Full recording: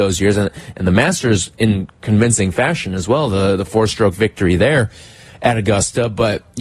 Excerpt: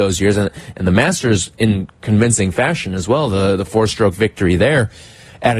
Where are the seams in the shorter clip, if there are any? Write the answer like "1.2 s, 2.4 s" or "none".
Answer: none